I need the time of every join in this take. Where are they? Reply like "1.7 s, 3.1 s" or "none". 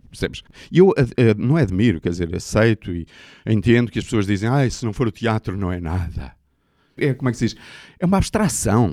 7.0 s